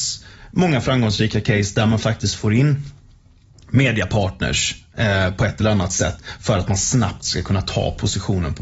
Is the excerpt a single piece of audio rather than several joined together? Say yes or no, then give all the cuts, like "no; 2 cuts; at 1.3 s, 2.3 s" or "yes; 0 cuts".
yes; 0 cuts